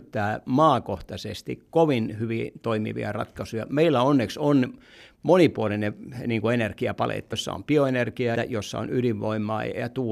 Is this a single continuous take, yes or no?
no